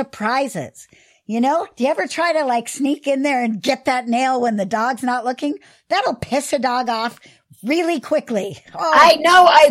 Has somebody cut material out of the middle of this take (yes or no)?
no